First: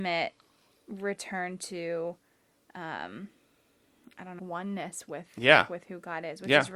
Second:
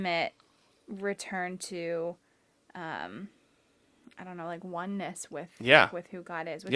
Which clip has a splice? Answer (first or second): first